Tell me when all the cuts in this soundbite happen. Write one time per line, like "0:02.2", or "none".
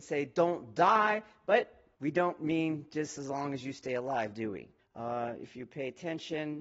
0:01.9
0:04.8